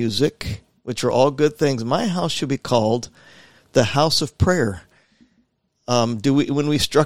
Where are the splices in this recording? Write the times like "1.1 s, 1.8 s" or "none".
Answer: 5.7 s